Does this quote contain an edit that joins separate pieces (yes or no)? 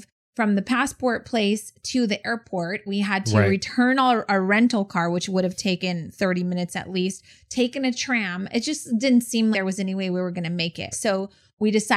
yes